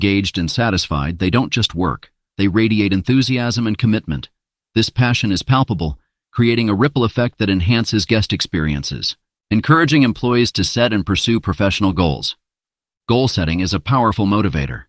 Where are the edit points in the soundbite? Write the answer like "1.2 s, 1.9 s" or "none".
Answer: 9.4 s